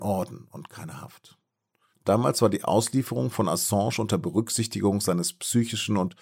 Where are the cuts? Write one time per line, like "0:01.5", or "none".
0:01.9